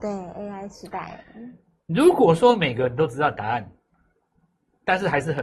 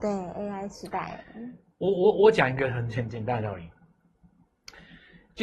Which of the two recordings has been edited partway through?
second; 1 cut; at 1.7 s

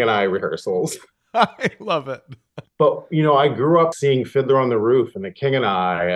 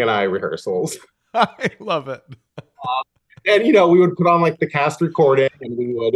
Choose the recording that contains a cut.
first; 2 cuts; at 2.6 s, 3.9 s

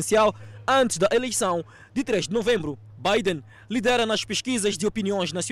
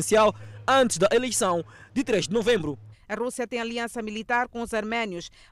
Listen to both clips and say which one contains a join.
second; 1 cut; at 2.9 s

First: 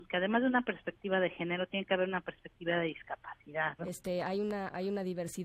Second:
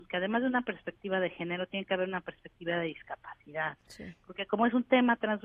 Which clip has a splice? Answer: first; 1 cut; at 3.8 s

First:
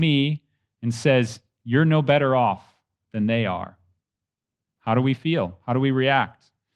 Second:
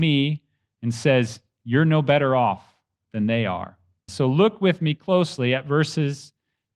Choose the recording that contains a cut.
second; 1 cut; at 4.1 s

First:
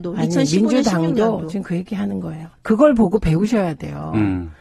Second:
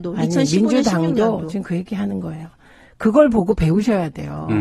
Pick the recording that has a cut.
first; 1 cut; at 2.6 s

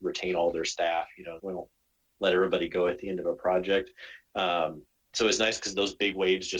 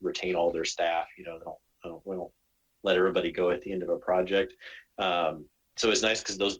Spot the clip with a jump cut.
first; 1 cut; at 1.4 s

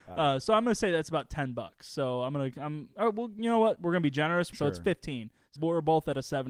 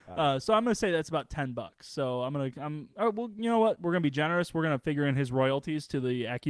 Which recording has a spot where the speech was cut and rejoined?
first; 2 cuts; at 4.5 s, 5.6 s

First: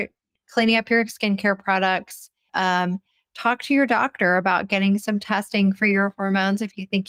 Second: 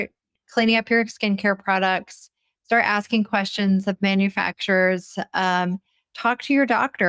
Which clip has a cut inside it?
first; 1 cut; at 2.5 s

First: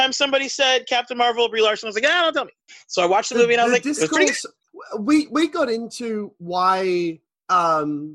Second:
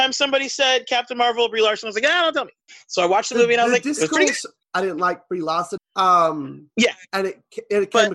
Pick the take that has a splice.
second; 2 cuts; at 4.6 s, 5.8 s

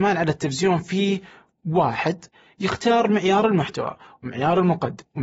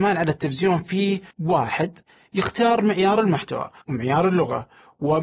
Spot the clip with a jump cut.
second; 2 cuts; at 1.3 s, 3.8 s

